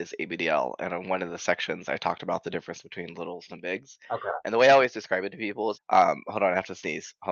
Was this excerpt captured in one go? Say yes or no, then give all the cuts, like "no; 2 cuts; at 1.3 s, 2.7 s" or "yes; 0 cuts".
no; 2 cuts; at 3.5 s, 5.7 s